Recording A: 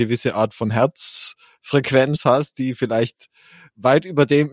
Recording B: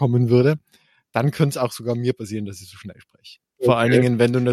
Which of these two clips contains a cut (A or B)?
B